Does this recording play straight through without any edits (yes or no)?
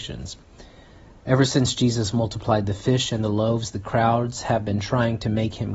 yes